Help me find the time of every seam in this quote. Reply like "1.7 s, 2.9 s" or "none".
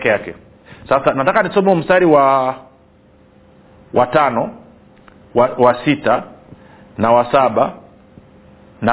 none